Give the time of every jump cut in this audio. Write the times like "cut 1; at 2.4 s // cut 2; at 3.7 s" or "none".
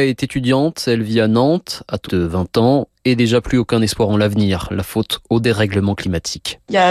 cut 1; at 2.1 s